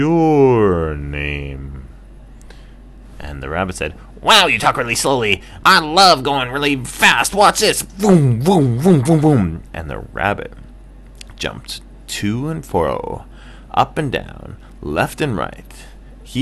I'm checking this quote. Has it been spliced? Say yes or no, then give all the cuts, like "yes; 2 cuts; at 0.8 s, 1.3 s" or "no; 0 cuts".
yes; 1 cut; at 5.6 s